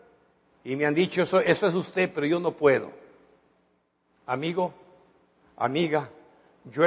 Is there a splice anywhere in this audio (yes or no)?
no